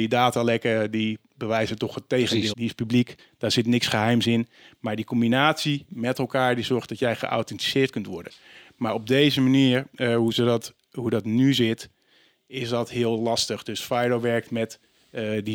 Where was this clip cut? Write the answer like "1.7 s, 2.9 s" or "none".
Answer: 2.5 s